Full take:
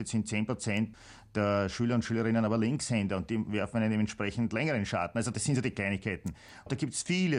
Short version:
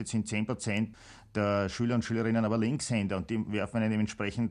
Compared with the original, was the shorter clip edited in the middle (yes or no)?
no